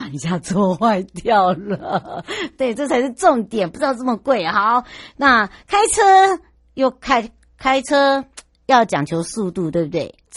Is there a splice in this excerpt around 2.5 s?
no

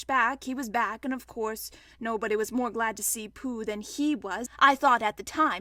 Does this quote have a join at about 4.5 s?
yes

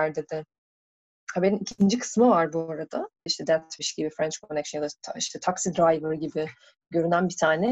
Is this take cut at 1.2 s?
no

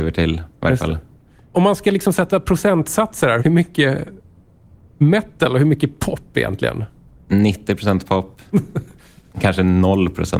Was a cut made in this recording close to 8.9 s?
yes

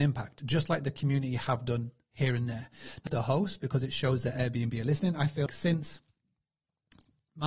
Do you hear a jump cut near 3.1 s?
yes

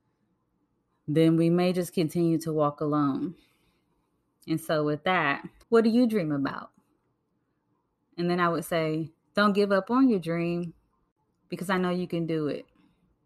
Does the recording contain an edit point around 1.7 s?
no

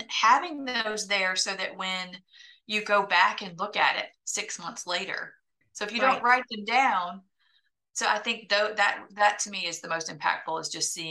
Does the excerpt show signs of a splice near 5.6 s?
yes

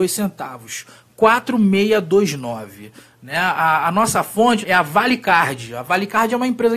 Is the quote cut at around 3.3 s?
no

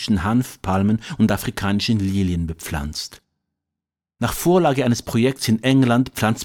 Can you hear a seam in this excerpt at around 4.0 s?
no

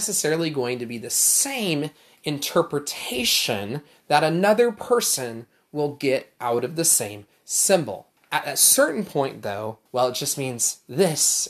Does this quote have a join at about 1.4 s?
no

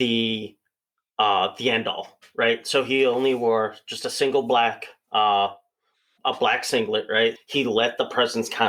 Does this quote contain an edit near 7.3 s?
yes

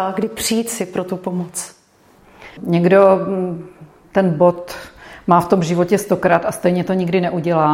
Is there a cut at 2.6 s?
yes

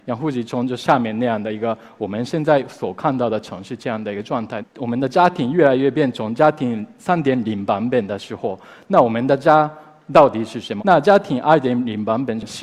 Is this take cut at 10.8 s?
yes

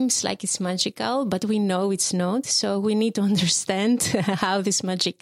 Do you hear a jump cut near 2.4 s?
no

